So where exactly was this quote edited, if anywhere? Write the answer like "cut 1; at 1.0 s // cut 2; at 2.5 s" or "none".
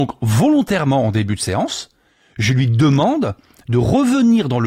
none